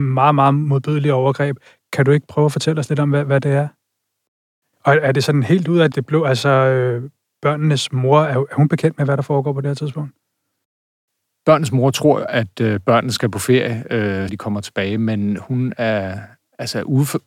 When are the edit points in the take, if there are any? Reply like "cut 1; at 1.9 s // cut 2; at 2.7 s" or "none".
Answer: cut 1; at 4.7 s // cut 2; at 5.9 s // cut 3; at 14.3 s